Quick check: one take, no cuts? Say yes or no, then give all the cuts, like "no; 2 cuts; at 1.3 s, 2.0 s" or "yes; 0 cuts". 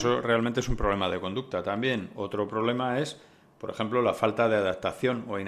yes; 0 cuts